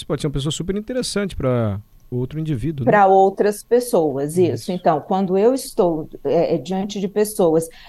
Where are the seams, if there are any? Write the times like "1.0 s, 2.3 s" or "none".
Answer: none